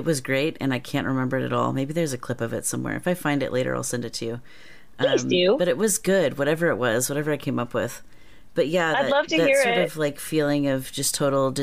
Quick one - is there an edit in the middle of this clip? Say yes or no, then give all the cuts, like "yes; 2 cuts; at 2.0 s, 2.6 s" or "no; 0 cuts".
no; 0 cuts